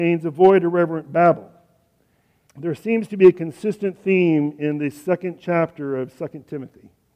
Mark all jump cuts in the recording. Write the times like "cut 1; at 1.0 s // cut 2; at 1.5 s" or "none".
cut 1; at 2.5 s